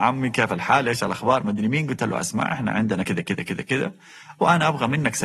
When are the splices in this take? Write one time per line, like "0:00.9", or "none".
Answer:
none